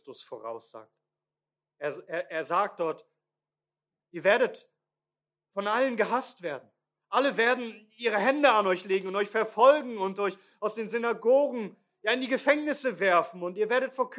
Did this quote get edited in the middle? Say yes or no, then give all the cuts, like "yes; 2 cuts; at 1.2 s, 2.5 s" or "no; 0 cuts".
no; 0 cuts